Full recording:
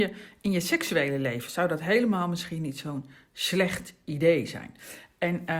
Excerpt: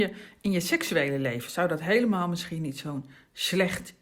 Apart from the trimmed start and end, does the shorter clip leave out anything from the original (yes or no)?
no